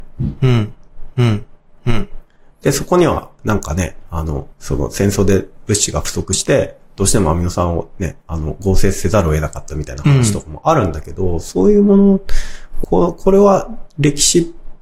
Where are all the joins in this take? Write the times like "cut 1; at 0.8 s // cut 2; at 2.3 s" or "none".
cut 1; at 4.5 s // cut 2; at 12.8 s